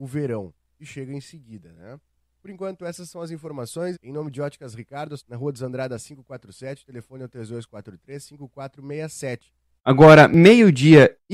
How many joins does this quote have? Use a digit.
3